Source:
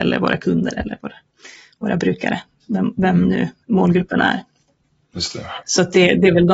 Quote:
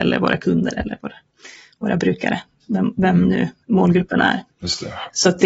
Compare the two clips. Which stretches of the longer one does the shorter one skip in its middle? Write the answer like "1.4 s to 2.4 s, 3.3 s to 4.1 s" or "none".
4.5 s to 5.0 s